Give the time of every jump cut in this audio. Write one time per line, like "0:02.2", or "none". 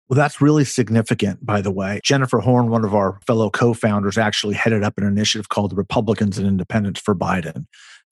0:02.0
0:03.2